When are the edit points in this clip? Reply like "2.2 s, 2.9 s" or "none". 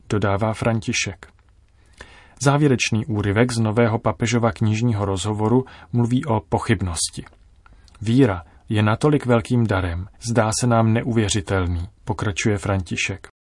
10.2 s